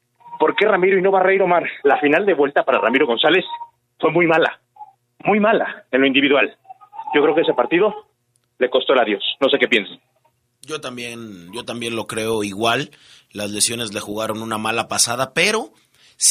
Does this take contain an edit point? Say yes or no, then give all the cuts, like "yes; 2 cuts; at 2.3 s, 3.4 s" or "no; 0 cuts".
yes; 1 cut; at 1.8 s